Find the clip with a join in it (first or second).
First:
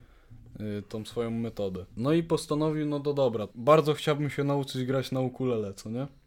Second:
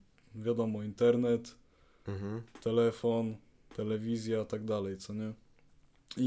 first